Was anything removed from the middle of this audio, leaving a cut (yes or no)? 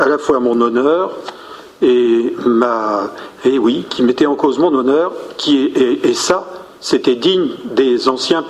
no